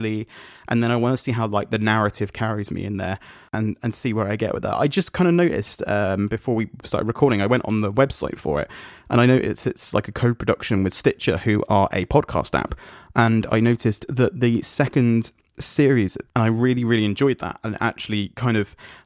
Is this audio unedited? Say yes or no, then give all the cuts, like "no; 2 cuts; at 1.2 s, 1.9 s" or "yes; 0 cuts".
no; 1 cut; at 16.3 s